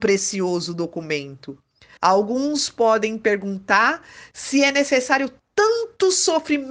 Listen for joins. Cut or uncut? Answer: cut